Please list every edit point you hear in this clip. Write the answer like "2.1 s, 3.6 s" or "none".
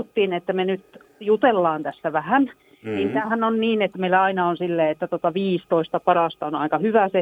none